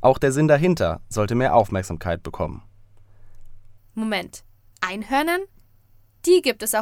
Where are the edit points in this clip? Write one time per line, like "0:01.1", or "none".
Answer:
0:03.8